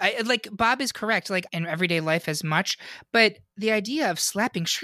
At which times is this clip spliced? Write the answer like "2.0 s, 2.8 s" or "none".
1.5 s